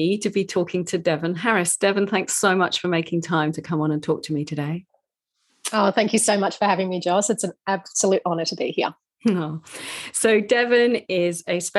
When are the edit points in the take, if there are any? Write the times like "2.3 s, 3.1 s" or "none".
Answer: none